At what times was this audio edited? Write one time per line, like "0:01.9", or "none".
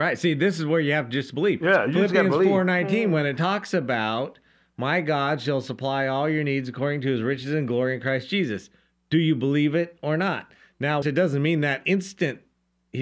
0:11.0